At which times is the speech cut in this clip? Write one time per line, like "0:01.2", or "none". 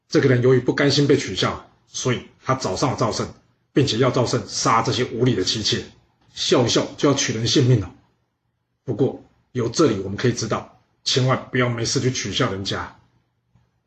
0:06.2